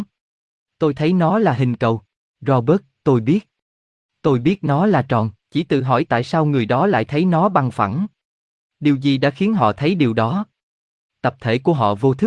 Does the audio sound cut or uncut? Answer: cut